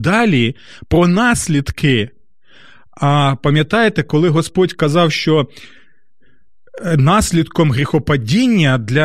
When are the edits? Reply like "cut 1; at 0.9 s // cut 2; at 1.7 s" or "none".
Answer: none